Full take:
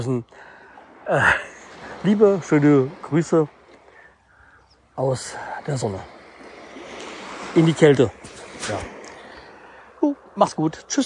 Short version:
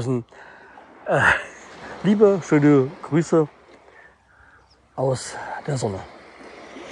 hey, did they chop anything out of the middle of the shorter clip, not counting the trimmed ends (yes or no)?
no